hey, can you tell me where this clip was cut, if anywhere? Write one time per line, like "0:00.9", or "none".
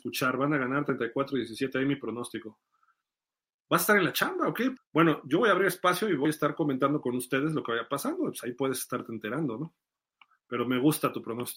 0:04.8